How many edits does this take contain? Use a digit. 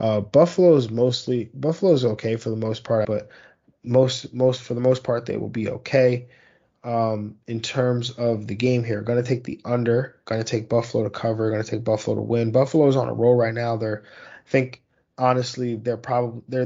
1